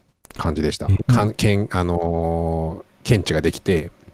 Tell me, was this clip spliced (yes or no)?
yes